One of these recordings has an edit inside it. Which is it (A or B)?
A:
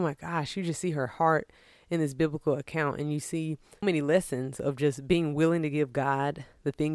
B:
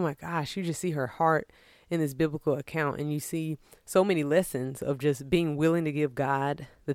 A